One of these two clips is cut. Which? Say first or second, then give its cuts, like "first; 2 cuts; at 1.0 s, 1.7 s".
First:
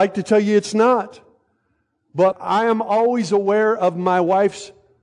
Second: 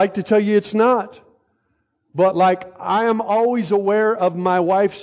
first; 1 cut; at 2.3 s